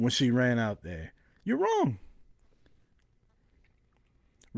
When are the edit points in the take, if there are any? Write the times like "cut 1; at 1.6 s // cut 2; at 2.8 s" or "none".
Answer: none